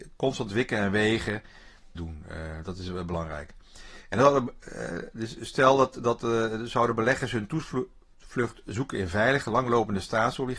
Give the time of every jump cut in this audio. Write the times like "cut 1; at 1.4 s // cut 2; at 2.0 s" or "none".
cut 1; at 2.0 s